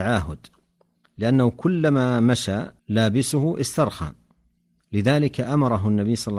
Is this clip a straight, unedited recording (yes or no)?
no